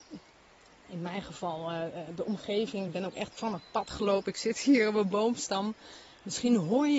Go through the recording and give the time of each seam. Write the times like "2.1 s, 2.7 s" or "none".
none